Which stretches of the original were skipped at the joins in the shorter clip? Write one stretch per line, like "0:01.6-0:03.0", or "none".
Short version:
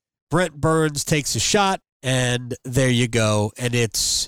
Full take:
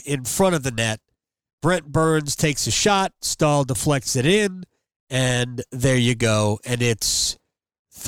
0:03.1-0:04.9